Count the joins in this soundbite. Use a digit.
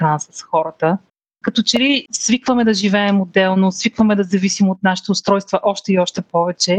0